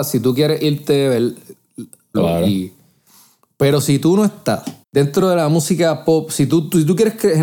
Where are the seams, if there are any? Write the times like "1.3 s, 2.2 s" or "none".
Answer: 2.1 s, 4.8 s